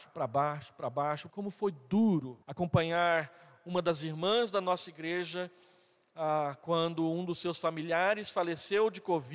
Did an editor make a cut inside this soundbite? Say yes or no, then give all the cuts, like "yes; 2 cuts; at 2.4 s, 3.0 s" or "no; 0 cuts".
yes; 2 cuts; at 1.3 s, 2.4 s